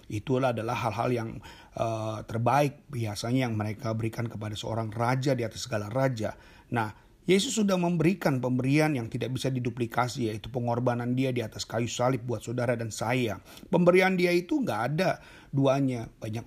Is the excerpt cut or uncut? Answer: uncut